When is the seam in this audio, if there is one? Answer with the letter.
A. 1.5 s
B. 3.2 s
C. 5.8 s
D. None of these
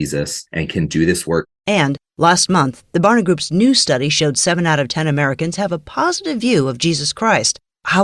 D